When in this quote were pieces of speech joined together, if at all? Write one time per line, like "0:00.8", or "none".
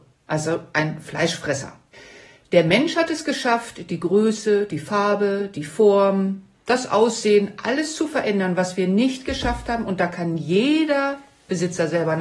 none